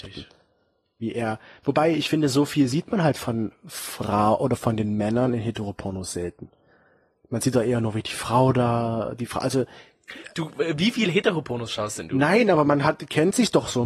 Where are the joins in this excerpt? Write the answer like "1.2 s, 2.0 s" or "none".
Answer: none